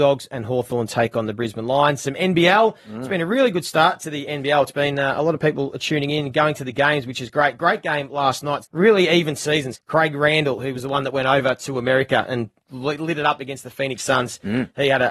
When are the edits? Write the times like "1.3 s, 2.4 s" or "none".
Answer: 8.6 s, 9.7 s